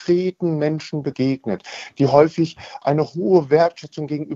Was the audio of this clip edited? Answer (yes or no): yes